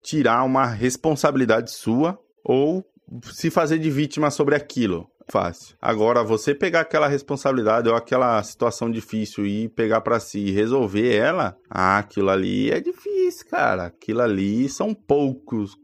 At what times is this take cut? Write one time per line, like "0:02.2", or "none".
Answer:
0:05.3